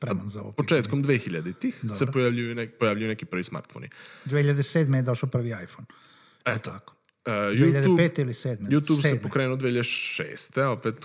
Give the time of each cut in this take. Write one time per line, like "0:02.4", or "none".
none